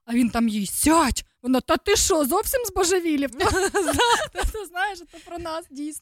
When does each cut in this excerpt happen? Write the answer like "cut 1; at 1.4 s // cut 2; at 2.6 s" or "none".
none